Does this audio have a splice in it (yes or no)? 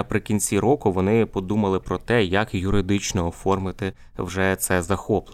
no